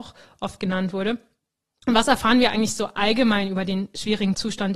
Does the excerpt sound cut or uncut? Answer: uncut